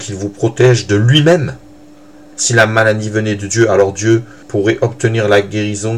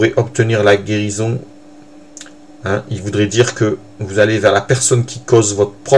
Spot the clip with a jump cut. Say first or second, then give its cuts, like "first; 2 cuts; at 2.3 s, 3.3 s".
first; 2 cuts; at 2.3 s, 4.4 s